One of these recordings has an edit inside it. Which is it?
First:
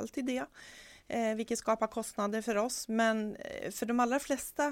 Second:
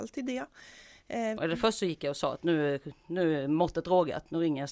second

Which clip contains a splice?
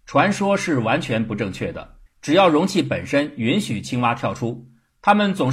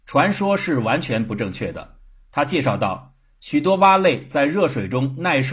first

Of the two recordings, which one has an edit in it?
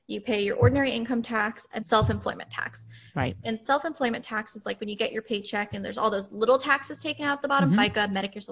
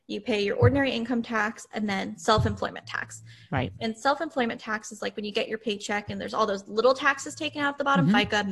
first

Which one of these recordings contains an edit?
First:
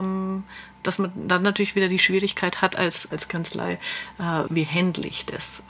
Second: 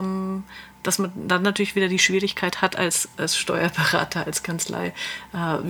first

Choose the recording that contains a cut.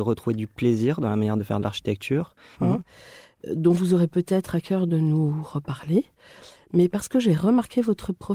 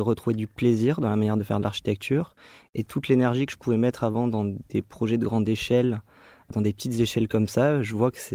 first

